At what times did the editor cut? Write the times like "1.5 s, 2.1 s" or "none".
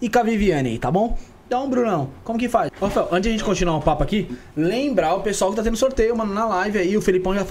2.7 s